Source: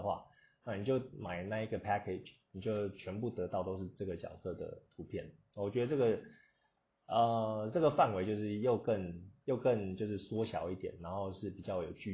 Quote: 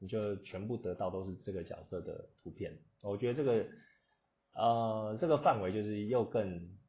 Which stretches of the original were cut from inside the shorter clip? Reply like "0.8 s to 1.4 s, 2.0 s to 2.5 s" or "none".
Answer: none